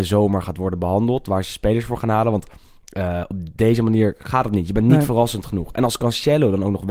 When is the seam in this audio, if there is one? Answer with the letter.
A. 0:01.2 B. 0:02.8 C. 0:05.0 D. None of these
D